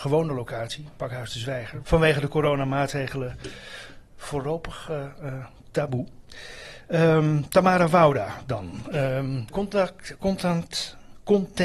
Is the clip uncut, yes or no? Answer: no